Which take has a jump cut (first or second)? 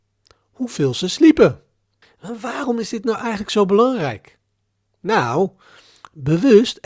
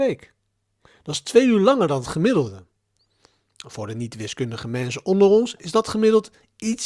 first